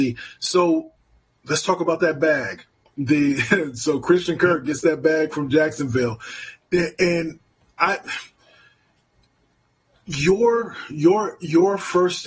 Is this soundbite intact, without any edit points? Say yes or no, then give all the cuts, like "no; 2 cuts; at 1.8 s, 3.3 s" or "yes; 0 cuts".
yes; 0 cuts